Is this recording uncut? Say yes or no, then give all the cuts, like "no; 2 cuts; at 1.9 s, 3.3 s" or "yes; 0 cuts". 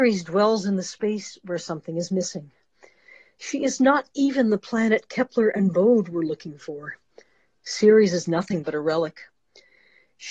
yes; 0 cuts